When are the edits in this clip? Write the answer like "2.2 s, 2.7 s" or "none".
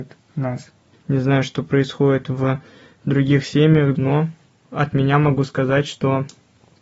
0.9 s, 3.9 s